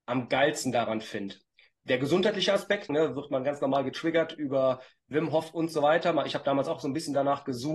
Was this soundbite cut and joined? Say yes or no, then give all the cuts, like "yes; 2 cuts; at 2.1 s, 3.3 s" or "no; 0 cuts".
yes; 1 cut; at 2.9 s